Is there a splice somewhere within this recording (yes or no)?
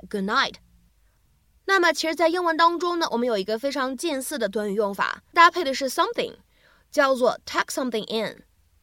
yes